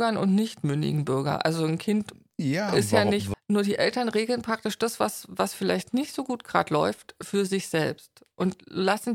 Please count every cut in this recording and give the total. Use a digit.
1